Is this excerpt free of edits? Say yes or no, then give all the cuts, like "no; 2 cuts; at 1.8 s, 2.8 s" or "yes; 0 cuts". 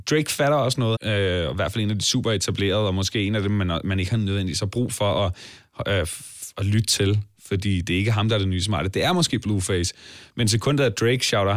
no; 1 cut; at 1.0 s